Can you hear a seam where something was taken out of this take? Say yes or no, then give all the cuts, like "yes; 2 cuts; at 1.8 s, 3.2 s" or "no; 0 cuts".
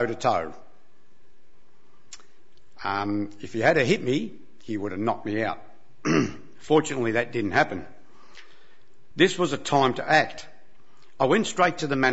yes; 1 cut; at 9.1 s